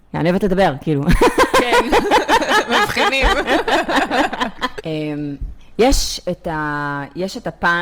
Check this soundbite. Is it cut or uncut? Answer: cut